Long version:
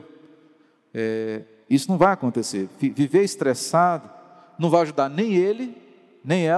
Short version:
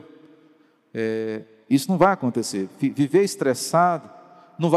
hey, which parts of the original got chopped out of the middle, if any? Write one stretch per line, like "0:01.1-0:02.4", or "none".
none

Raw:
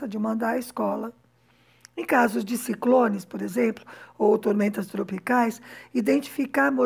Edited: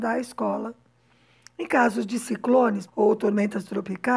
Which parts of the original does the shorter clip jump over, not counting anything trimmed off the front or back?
0:03.3-0:04.1

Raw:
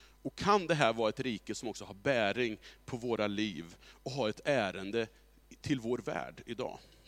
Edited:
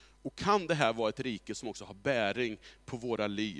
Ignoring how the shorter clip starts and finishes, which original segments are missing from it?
none

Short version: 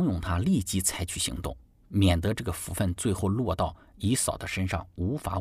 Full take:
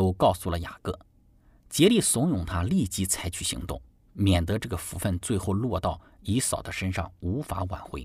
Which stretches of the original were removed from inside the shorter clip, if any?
none

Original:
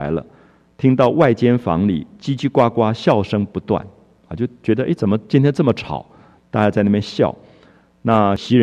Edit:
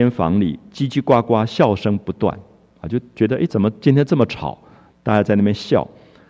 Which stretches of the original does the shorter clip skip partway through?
none

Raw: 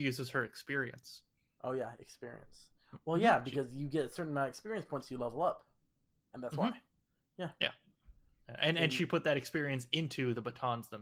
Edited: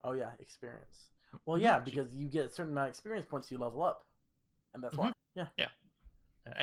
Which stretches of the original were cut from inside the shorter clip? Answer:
0:06.7-0:07.2

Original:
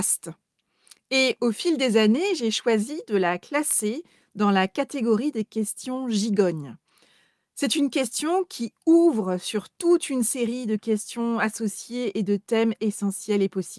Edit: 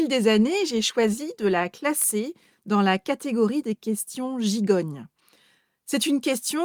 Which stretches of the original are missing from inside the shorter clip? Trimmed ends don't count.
none

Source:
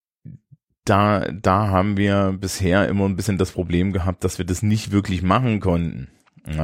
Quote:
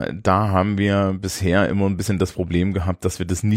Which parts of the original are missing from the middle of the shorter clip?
none

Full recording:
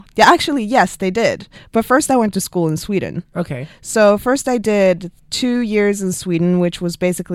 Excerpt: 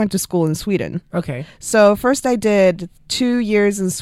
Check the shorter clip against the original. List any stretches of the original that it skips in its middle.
none

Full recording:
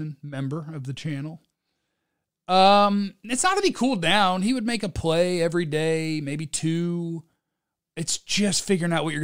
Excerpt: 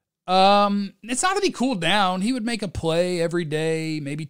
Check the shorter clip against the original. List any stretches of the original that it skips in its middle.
none

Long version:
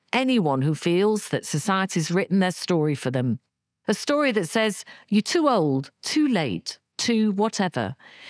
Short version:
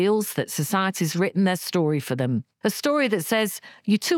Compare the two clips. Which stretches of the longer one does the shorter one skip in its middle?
0:03.5-0:03.8

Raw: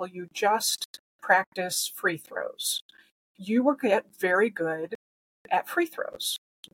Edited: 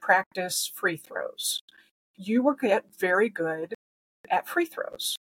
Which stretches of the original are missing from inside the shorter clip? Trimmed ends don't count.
none

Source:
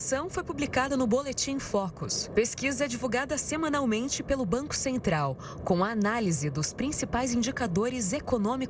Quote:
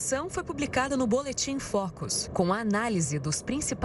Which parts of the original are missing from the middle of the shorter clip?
0:02.3-0:05.6

